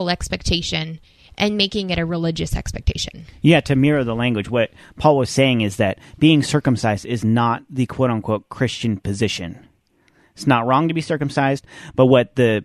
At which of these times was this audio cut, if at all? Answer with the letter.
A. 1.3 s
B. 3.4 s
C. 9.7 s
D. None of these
D